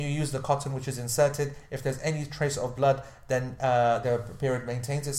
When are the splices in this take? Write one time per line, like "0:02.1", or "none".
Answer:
0:04.0